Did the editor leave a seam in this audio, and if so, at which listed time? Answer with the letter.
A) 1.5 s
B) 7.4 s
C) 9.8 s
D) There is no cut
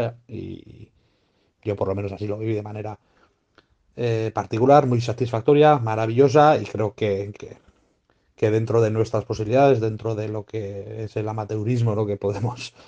B